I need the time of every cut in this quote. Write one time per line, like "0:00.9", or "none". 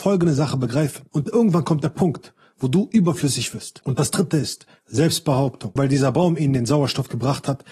0:01.1
0:03.8
0:05.8